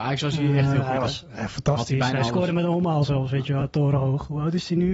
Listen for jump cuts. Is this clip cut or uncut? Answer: cut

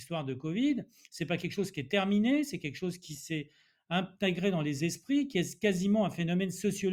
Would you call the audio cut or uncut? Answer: uncut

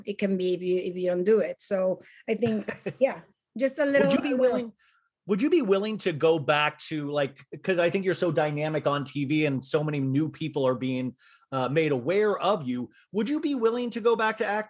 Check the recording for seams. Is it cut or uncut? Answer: uncut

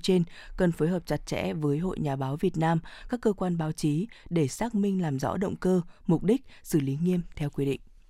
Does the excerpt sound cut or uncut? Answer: uncut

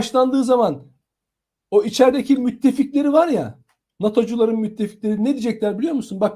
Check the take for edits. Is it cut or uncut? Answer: uncut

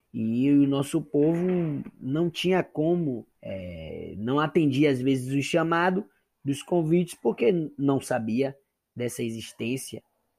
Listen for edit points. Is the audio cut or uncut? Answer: cut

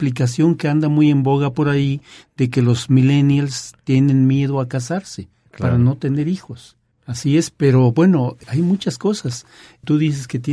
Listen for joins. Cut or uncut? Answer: uncut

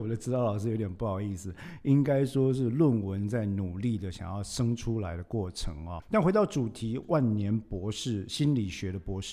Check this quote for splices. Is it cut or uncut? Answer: cut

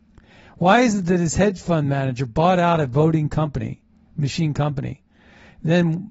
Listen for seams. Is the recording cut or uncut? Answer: uncut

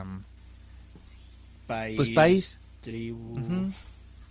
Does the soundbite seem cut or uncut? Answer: uncut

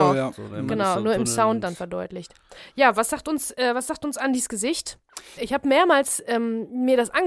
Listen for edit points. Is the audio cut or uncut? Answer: cut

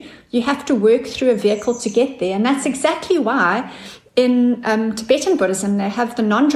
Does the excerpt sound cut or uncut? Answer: uncut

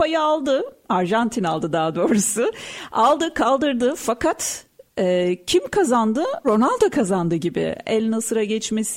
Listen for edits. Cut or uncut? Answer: cut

